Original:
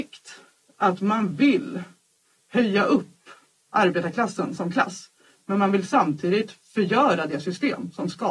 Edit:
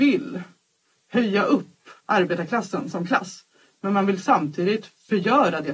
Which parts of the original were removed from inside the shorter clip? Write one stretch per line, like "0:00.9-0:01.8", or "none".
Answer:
0:03.4-0:03.7